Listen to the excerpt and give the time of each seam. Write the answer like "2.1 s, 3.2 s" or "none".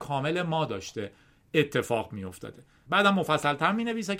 2.9 s